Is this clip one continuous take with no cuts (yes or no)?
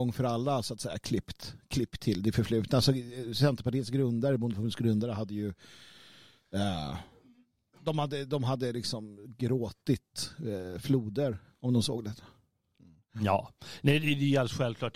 yes